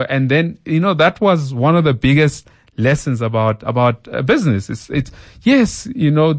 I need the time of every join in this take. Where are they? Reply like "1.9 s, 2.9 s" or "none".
none

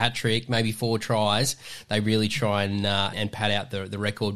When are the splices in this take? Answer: 3.1 s

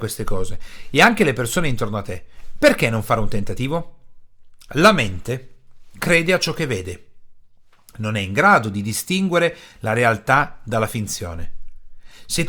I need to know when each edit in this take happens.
4.7 s, 6.0 s

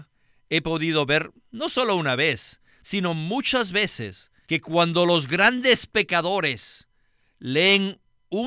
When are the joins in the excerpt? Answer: 4.5 s

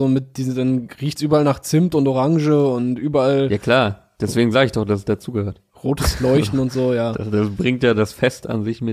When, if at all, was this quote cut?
none

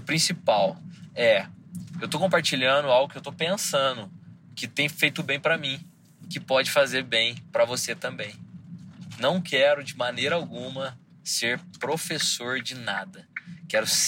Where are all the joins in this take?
none

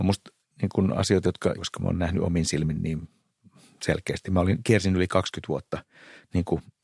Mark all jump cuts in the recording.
1.6 s

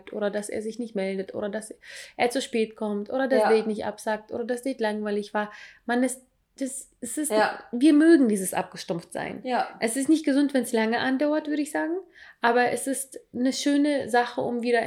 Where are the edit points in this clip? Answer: none

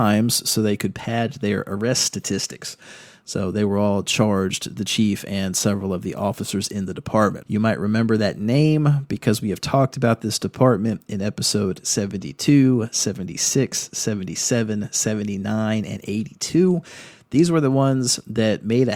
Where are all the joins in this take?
7.4 s

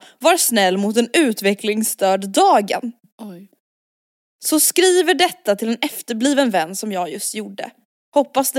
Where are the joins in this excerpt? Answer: none

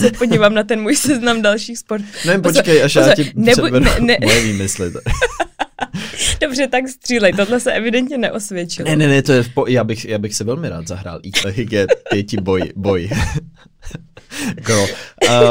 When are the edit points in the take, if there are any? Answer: 11.4 s

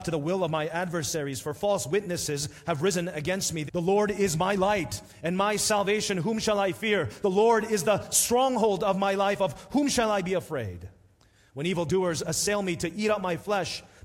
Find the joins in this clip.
3.7 s

